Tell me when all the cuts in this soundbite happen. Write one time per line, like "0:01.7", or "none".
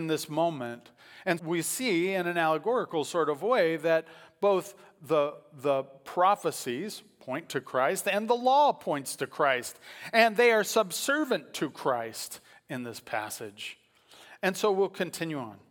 0:01.4